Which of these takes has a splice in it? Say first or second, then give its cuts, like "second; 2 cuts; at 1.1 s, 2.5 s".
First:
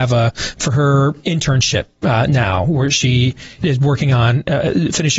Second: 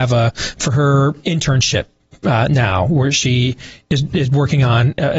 first; 2 cuts; at 2.0 s, 3.6 s